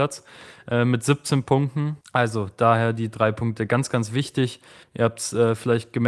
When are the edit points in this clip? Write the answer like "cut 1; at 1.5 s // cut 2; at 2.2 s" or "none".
cut 1; at 2.0 s // cut 2; at 4.8 s